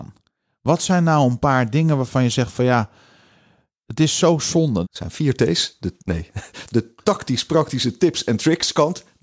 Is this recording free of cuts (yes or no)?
no